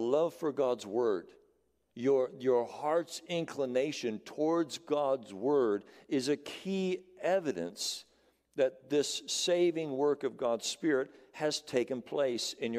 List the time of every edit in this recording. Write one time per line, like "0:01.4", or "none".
none